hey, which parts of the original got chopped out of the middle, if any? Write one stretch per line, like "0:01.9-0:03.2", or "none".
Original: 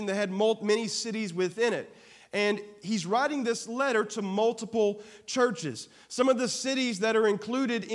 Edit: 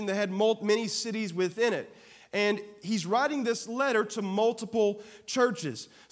none